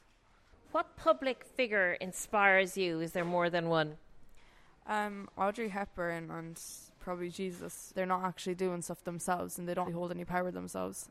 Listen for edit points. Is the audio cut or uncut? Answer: cut